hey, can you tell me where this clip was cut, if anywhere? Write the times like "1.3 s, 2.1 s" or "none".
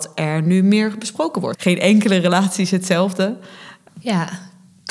1.6 s, 3.9 s